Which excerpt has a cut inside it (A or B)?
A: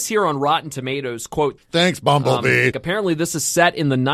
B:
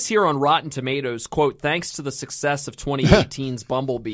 A